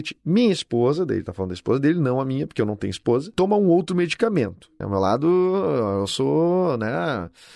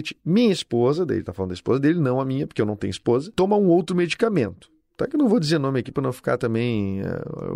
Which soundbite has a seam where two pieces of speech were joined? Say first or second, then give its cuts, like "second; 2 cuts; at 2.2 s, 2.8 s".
first; 1 cut; at 4.8 s